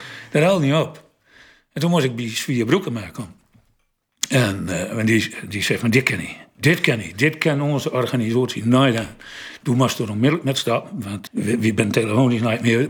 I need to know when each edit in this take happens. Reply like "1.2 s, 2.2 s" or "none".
11.3 s